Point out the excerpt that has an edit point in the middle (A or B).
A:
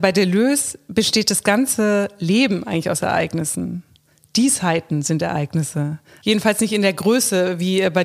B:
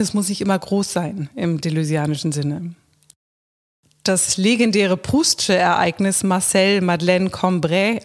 A